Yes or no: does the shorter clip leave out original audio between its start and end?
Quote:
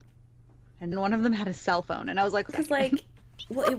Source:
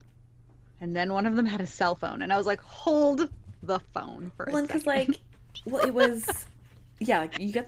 yes